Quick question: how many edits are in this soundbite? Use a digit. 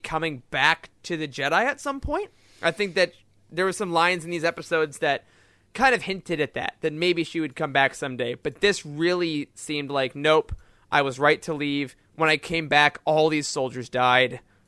0